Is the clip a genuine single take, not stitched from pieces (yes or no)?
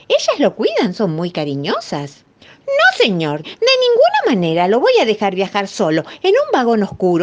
no